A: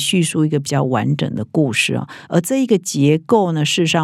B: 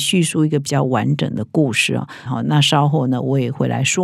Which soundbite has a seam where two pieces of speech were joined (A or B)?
B